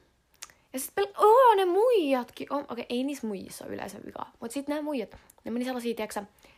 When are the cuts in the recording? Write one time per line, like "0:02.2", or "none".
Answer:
none